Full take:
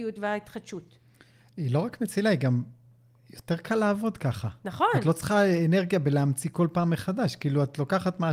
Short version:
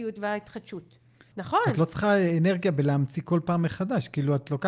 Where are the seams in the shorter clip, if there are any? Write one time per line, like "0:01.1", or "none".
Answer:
0:01.3